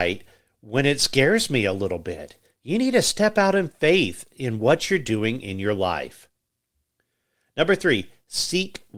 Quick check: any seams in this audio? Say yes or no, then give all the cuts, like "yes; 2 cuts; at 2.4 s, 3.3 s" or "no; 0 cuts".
no; 0 cuts